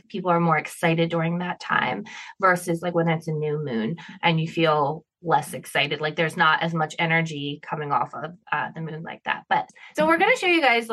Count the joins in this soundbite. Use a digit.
1